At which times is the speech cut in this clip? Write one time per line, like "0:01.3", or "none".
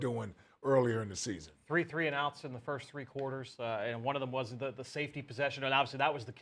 none